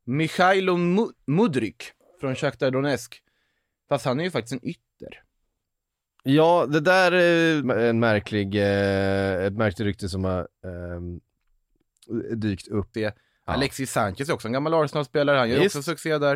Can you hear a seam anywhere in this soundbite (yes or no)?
yes